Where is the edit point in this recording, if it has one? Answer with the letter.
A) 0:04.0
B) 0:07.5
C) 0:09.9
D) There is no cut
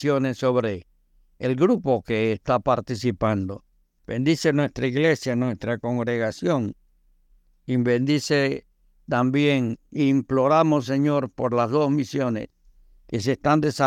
A